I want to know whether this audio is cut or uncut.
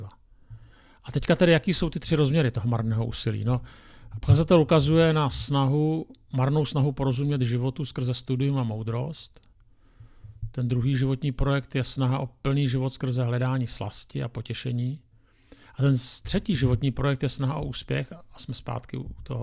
uncut